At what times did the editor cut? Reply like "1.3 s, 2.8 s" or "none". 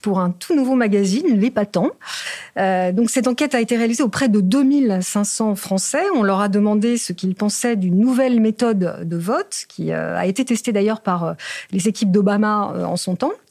none